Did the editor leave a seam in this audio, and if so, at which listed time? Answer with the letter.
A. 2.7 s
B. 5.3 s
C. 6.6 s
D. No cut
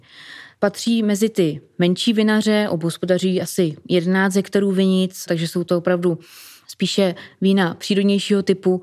B